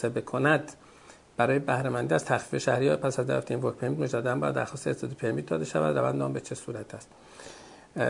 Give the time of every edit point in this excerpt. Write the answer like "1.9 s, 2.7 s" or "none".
none